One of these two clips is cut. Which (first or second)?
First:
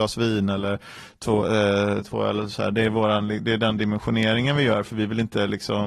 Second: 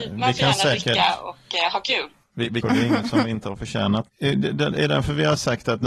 second